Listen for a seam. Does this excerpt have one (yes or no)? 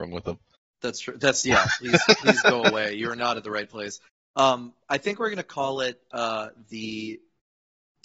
no